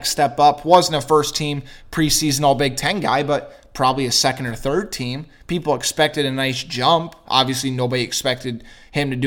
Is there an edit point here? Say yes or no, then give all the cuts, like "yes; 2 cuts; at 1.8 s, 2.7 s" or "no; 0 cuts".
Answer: no; 0 cuts